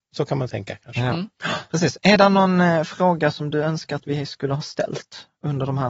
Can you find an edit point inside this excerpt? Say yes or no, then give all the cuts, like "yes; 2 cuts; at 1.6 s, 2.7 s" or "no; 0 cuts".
no; 0 cuts